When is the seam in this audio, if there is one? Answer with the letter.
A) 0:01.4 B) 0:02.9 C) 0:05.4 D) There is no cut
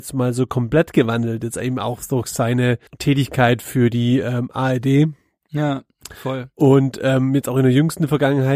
B